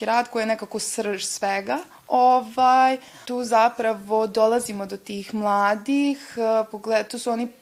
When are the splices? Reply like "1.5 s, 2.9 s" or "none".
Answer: 3.2 s, 6.7 s